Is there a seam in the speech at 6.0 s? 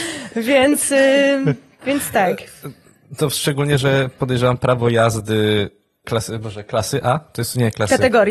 yes; 1 cut; at 6.0 s

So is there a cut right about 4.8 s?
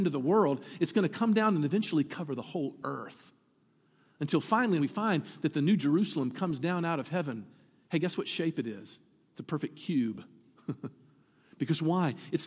yes; 1 cut; at 4.8 s

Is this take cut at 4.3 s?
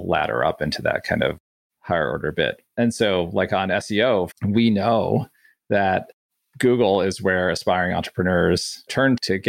yes; 1 cut; at 4.3 s

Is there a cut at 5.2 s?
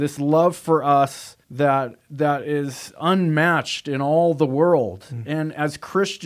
no; 1 cut; at 1.4 s

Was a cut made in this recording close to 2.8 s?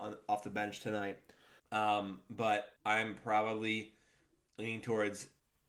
yes; 2 cuts; at 1.6 s, 2.8 s

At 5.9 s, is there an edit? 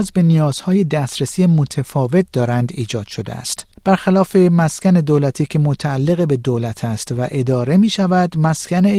no; 1 cut; at 3.8 s

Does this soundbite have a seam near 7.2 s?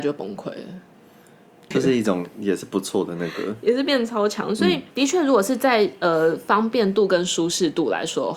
no; 2 cuts; at 1.7 s, 4.9 s

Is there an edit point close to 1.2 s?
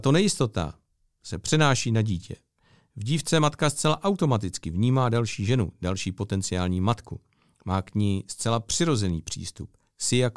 yes; 1 cut; at 1.2 s

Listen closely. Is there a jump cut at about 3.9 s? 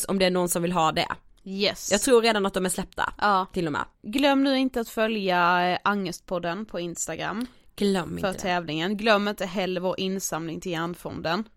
yes; 1 cut; at 3.9 s

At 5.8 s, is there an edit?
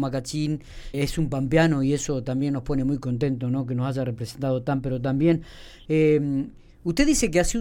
no; 1 cut; at 0.9 s

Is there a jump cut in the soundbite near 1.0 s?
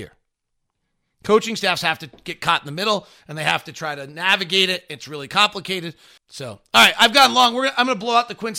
no; 1 cut; at 6.2 s

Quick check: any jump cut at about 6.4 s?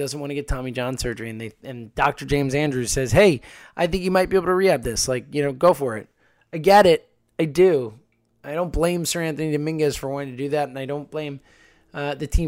no; 0 cuts

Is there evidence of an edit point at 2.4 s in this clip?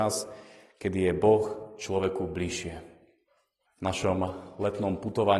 no; 1 cut; at 3.7 s

